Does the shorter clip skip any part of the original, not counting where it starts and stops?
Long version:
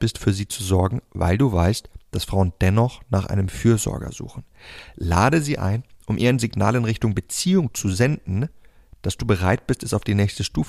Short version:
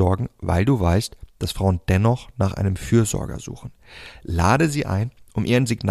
no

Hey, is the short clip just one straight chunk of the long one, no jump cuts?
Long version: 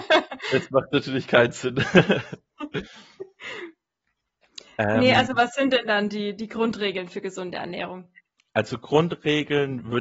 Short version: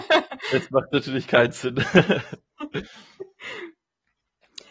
yes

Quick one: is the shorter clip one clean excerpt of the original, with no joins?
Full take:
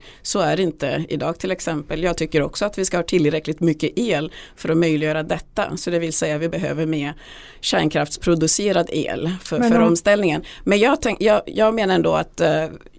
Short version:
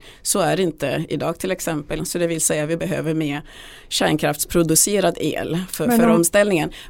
no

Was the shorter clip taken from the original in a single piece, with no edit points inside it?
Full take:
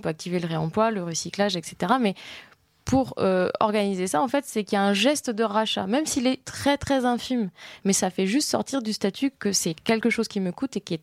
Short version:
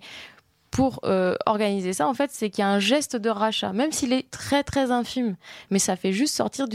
yes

